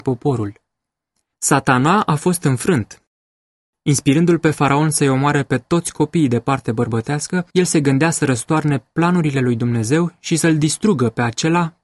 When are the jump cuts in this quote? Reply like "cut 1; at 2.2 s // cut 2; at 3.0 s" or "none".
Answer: cut 1; at 1.3 s // cut 2; at 7.5 s